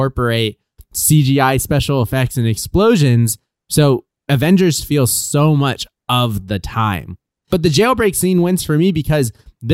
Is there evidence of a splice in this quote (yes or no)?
yes